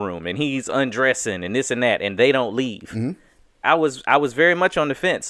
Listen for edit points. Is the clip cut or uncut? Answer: cut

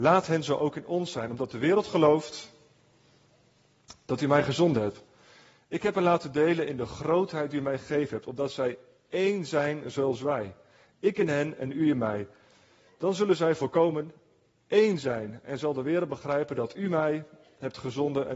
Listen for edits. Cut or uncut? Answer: uncut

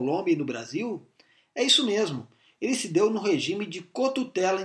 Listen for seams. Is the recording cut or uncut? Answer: uncut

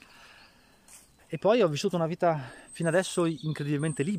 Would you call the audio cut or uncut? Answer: cut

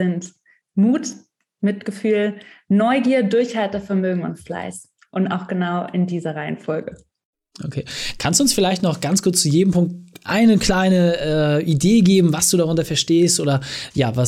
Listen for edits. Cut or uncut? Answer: uncut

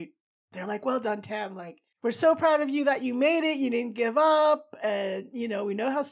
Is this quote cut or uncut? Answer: uncut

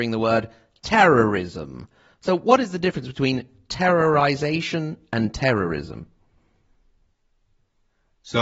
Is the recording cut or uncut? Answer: uncut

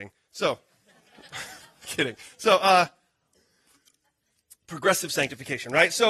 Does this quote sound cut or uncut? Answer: uncut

